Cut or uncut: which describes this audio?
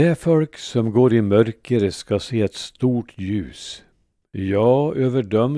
uncut